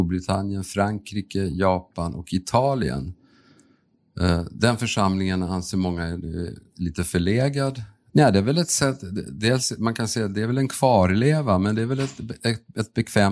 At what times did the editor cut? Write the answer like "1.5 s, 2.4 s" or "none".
8.1 s